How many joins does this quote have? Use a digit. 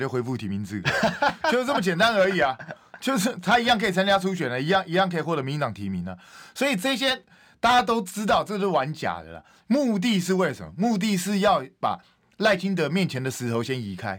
0